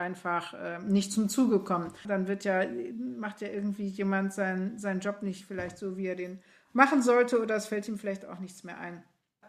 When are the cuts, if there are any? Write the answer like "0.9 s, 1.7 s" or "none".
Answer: 2.0 s

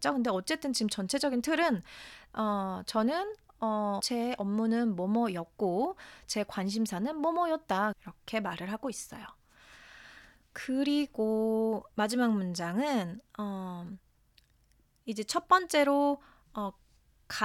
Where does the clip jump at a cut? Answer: 4.0 s, 7.9 s

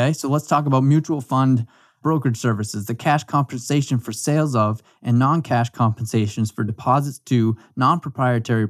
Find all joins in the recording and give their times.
none

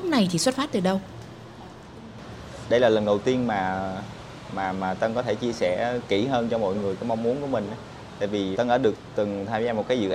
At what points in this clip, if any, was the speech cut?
8.5 s

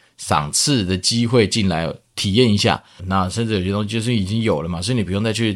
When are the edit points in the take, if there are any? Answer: 3.0 s

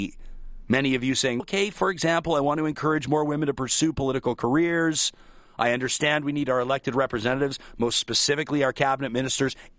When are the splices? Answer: 1.4 s

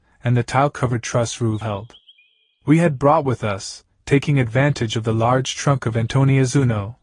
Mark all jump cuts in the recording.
1.6 s

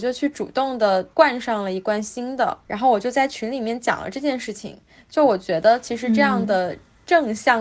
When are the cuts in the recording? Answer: none

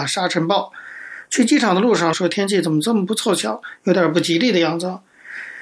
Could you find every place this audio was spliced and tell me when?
2.1 s

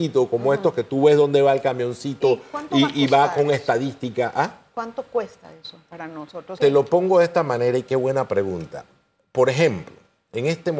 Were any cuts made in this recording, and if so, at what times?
6.6 s

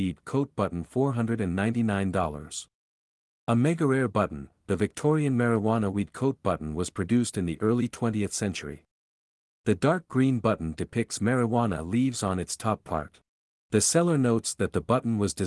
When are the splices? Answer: 13.6 s

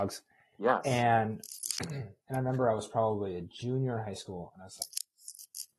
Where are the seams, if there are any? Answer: 2.2 s, 4.5 s

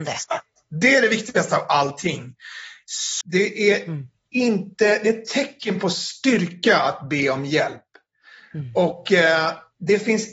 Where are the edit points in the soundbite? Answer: 3.2 s

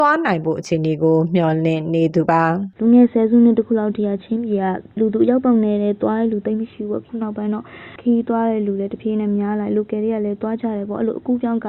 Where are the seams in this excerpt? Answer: 4.9 s

